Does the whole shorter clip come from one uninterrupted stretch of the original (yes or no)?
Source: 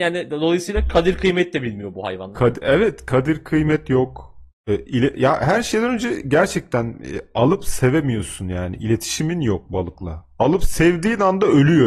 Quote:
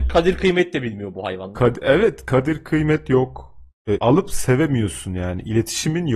no